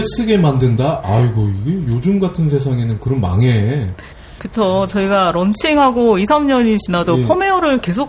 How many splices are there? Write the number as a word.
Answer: one